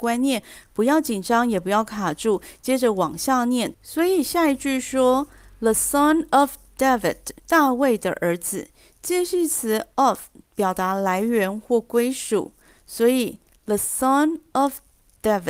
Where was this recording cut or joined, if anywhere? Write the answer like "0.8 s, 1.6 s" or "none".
3.7 s, 7.4 s